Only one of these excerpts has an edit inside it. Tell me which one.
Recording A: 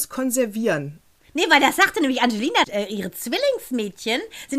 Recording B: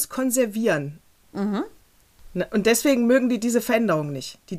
A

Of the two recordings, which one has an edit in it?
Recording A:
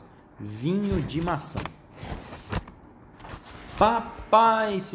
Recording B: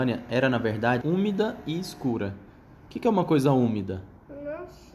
B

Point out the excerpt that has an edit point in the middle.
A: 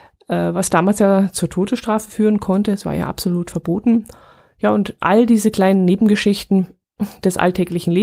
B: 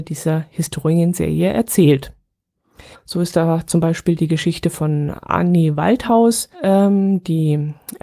B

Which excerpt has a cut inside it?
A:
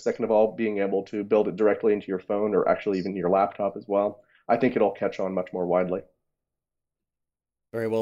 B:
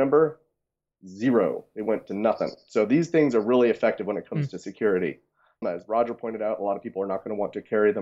B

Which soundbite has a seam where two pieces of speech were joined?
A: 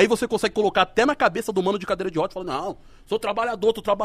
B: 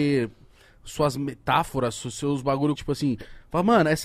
B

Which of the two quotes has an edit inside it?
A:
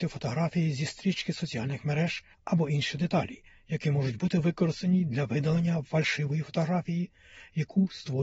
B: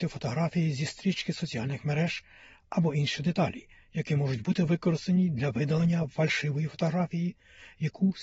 A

